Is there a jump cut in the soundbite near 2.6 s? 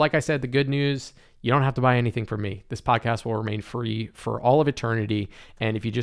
no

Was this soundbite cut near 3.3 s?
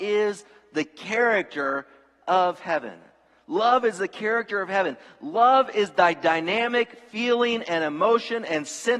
no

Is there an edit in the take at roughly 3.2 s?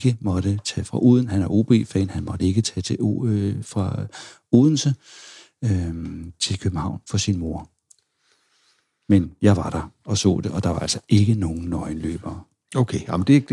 no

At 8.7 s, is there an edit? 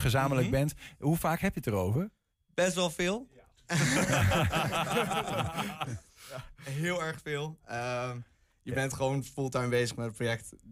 no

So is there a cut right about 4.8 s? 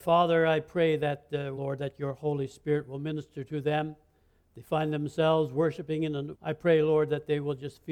no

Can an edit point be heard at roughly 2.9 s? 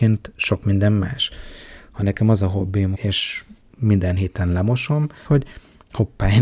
yes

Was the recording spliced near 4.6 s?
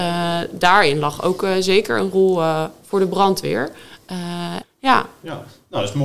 yes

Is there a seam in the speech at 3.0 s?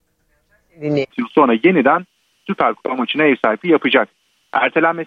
no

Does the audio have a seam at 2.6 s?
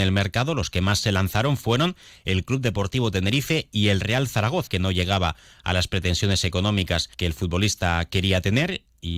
no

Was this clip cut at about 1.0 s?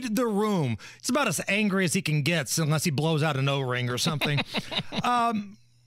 yes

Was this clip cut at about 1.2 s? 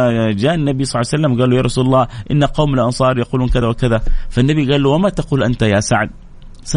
no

